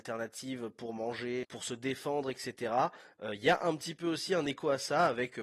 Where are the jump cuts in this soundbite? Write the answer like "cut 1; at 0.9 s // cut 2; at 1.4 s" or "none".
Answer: cut 1; at 1.4 s